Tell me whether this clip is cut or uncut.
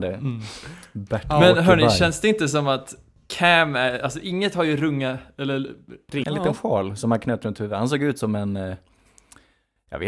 cut